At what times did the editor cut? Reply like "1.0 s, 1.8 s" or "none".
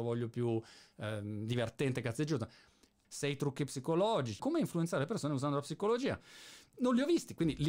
3.0 s, 4.4 s, 6.7 s